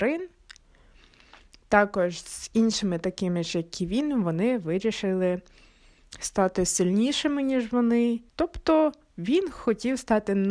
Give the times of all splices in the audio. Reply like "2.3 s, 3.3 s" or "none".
8.3 s